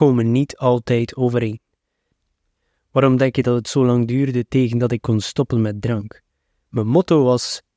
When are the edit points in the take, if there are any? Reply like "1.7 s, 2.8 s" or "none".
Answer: none